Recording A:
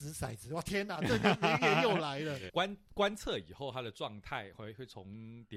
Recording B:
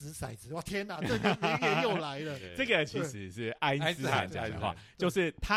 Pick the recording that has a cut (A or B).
A